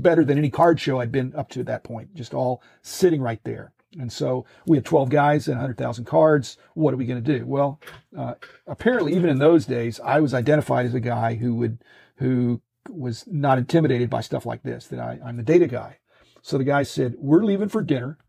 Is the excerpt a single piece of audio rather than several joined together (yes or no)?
yes